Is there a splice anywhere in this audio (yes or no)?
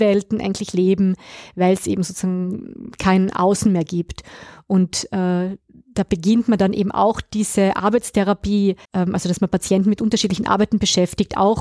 yes